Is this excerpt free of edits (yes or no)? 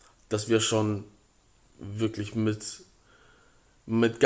yes